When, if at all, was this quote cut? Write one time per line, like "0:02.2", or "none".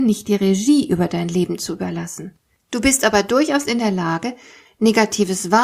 0:02.6